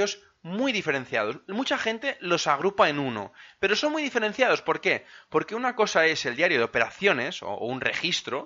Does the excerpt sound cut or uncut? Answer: uncut